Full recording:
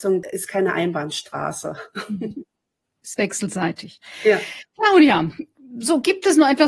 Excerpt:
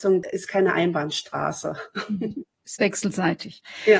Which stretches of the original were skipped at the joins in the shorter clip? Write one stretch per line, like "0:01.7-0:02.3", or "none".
0:02.5-0:02.9